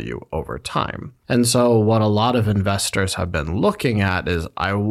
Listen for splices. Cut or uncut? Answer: uncut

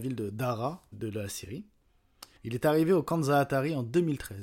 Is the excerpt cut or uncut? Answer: cut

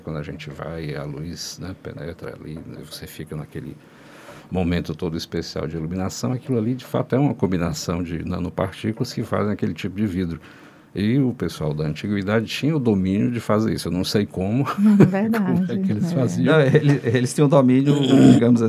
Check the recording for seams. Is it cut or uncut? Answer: uncut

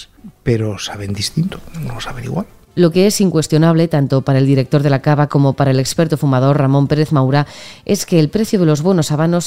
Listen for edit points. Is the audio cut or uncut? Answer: cut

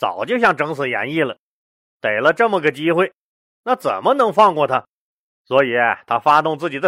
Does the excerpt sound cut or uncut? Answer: uncut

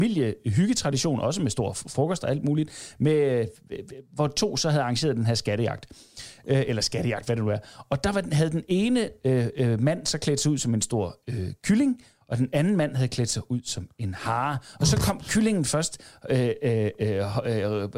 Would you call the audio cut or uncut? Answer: uncut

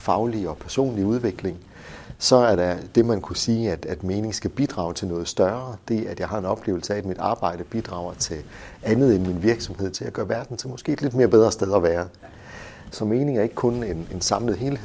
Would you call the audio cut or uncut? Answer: cut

